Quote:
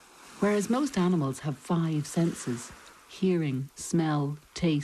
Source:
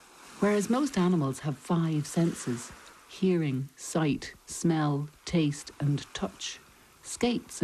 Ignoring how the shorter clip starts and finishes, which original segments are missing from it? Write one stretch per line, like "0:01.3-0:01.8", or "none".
0:03.7-0:04.4